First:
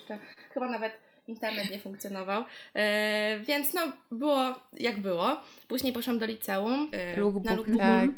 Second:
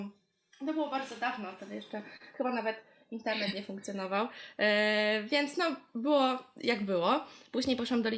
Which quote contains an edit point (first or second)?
first